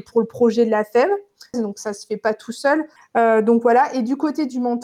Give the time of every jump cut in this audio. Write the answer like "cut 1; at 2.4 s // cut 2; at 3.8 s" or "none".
cut 1; at 1.5 s // cut 2; at 3.0 s